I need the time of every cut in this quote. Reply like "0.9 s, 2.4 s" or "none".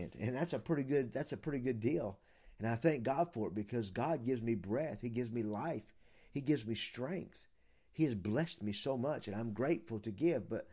none